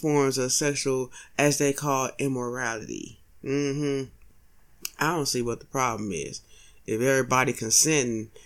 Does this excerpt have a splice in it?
no; 0 cuts

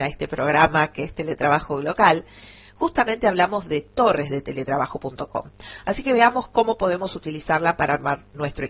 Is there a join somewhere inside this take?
no; 0 cuts

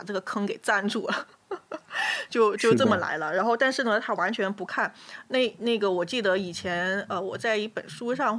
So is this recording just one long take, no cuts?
yes; 0 cuts

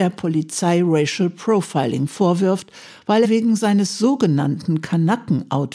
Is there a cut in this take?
yes; 1 cut; at 3.2 s

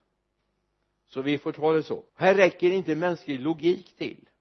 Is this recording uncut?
no; 1 cut; at 2.1 s

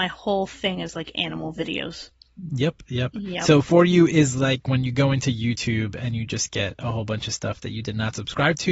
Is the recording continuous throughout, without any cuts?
yes; 0 cuts

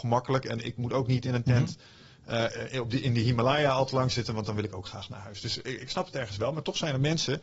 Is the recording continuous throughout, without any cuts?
yes; 0 cuts

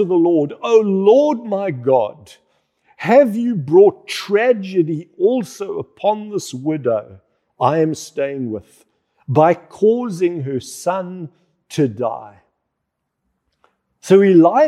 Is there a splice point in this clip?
no; 0 cuts

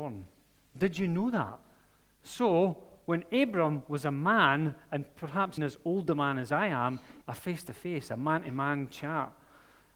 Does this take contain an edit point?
yes; 2 cuts; at 5.6 s, 7.2 s

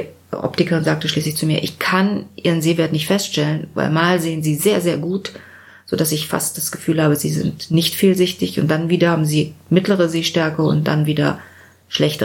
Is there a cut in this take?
no; 0 cuts

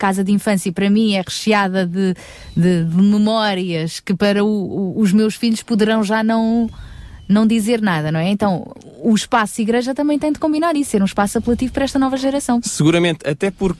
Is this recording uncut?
yes; 0 cuts

